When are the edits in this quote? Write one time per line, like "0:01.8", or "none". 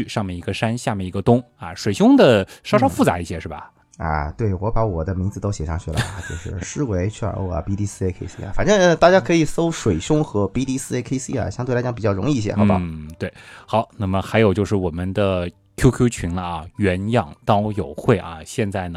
none